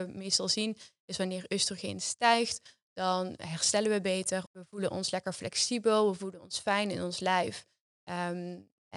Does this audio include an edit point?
yes; 1 cut; at 4.5 s

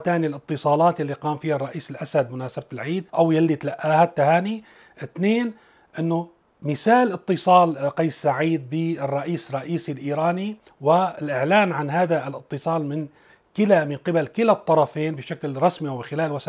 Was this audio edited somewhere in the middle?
yes; 1 cut; at 3.1 s

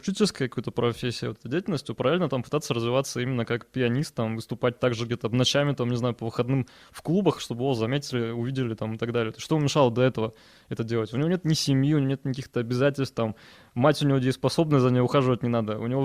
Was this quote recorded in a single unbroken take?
yes; 0 cuts

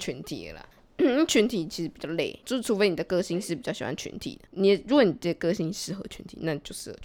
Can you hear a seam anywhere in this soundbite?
no; 0 cuts

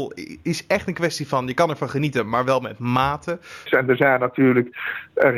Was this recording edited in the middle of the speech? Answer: yes; 1 cut; at 3.7 s

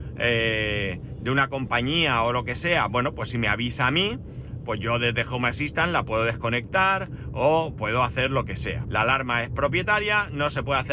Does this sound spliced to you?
yes; 1 cut; at 8.8 s

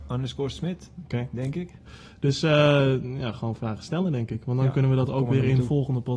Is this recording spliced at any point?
no; 0 cuts

